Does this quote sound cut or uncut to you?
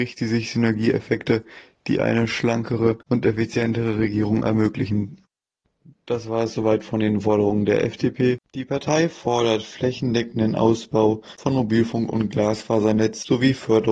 cut